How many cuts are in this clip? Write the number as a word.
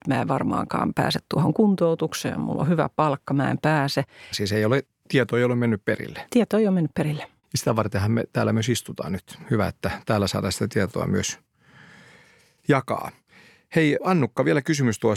one